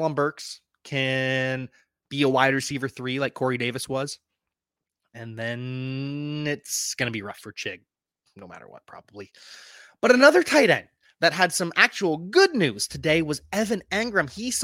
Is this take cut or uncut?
uncut